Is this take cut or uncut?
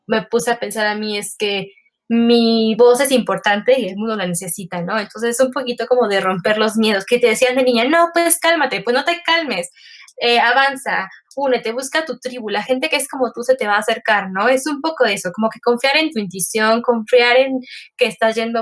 uncut